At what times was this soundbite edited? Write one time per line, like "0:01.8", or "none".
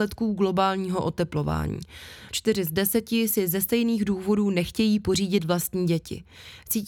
0:02.3